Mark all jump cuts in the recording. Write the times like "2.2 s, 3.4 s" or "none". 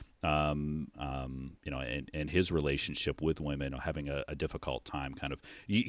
0.9 s, 3.7 s

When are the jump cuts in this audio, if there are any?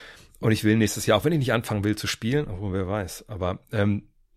none

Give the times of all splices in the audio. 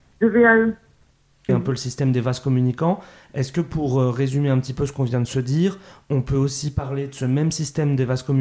1.5 s

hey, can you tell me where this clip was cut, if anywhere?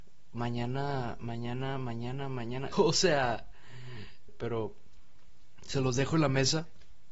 2.7 s, 4.3 s

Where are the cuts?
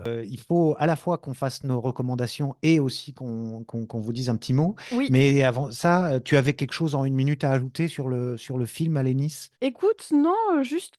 9.5 s

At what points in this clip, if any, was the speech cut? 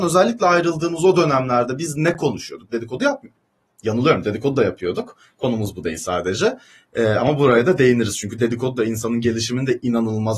none

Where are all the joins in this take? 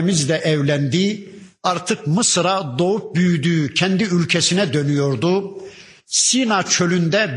none

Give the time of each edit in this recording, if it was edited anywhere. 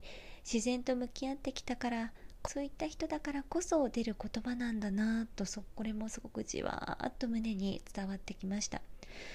2.5 s

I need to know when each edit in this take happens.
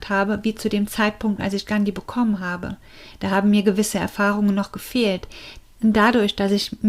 5.6 s

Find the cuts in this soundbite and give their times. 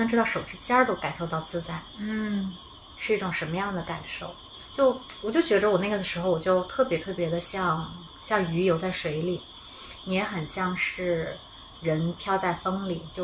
none

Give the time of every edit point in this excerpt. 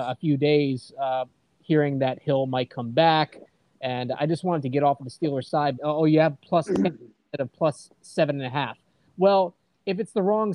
5.8 s

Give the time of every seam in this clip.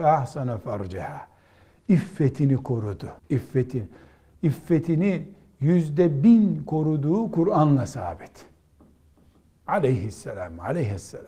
3.2 s

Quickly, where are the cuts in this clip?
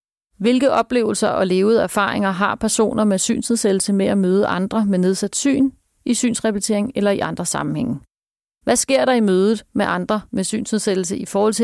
none

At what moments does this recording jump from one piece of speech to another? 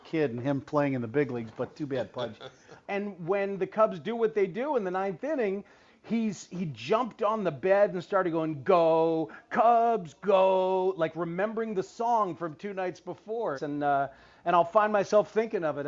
2.8 s, 13.5 s

